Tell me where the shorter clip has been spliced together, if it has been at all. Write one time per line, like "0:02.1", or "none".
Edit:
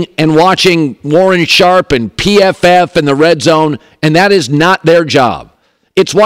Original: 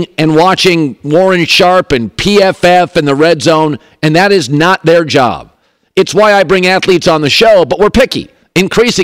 none